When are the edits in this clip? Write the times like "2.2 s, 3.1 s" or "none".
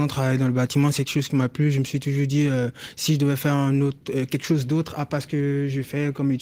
none

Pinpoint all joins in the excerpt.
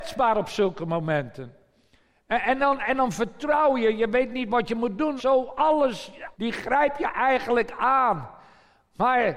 5.2 s, 6.3 s

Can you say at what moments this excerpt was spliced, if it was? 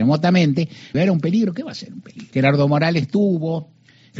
0.9 s, 2.3 s

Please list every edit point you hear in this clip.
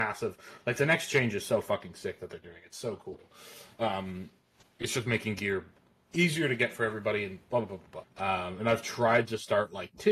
8.0 s

